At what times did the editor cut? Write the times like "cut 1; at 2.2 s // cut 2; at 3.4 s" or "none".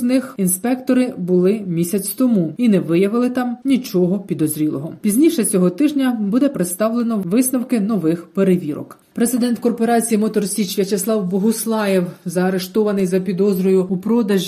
cut 1; at 9.0 s